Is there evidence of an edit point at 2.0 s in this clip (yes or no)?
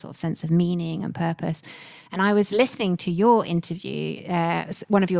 no